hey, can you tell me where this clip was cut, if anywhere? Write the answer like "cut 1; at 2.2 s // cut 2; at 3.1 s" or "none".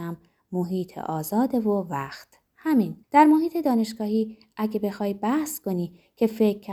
cut 1; at 3.0 s

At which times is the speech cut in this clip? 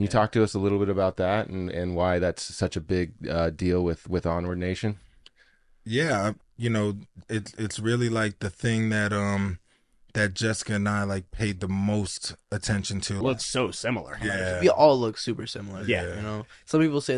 cut 1; at 6.4 s // cut 2; at 13.2 s

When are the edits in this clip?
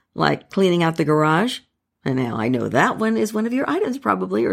none

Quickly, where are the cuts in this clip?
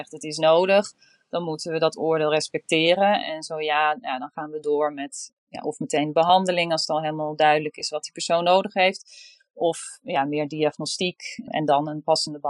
cut 1; at 3.2 s

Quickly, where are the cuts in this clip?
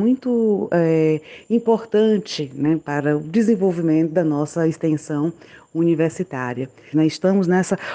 cut 1; at 6.9 s

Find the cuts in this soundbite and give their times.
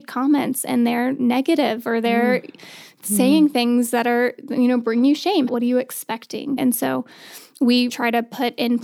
cut 1; at 5.5 s // cut 2; at 6.6 s // cut 3; at 7.9 s

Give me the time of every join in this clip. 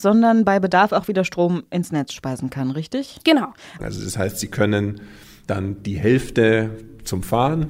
cut 1; at 3.8 s

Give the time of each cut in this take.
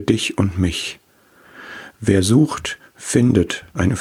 none

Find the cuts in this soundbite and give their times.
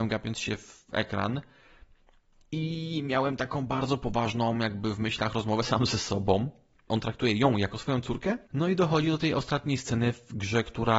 cut 1; at 6.9 s

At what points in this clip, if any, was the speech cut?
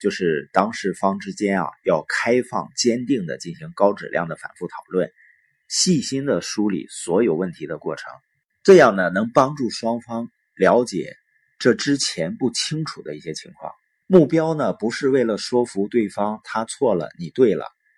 cut 1; at 14.0 s

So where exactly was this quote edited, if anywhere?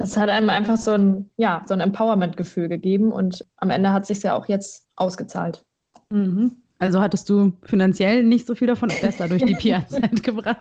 cut 1; at 8.9 s

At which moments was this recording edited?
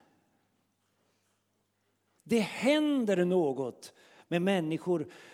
cut 1; at 2.2 s

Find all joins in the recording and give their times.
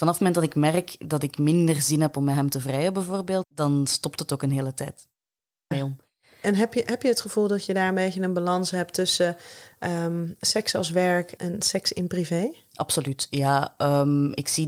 cut 1; at 3.4 s // cut 2; at 5.7 s // cut 3; at 11.4 s

